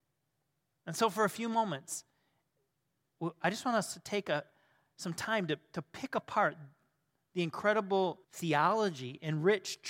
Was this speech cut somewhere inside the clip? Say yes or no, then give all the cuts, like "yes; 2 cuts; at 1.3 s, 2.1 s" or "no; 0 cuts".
yes; 1 cut; at 8.2 s